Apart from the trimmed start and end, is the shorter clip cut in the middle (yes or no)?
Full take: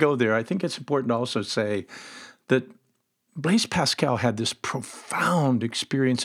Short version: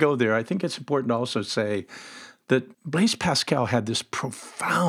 yes